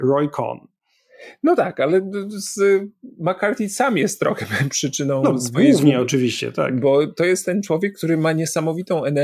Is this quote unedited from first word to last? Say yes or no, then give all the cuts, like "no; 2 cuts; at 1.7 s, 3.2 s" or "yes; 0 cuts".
yes; 0 cuts